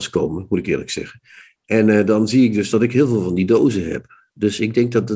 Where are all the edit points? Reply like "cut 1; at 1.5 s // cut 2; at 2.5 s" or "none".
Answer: none